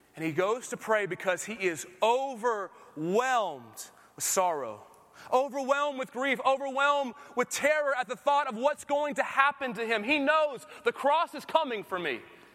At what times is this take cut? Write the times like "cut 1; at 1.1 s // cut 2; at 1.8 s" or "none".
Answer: none